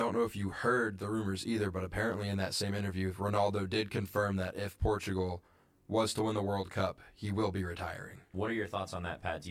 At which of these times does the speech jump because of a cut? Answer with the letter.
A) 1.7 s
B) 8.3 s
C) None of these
B